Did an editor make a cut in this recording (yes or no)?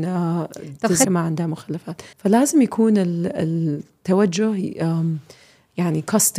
yes